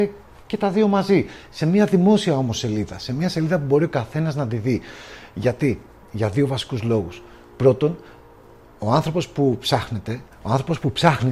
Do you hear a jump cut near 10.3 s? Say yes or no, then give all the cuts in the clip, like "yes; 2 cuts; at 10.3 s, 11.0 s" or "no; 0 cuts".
yes; 1 cut; at 10.3 s